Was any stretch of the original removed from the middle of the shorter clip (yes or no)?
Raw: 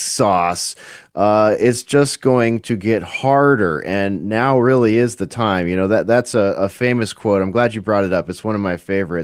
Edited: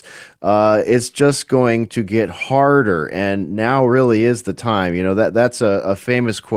no